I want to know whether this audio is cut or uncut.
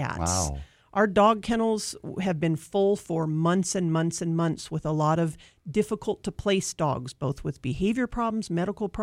uncut